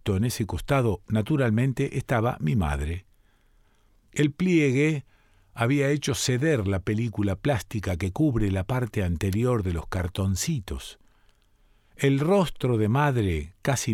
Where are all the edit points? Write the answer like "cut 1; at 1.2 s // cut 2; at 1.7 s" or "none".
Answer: none